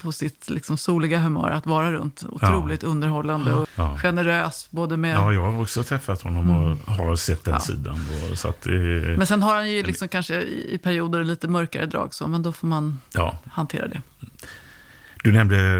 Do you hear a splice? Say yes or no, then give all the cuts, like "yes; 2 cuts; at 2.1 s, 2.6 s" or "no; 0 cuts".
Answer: yes; 1 cut; at 3.6 s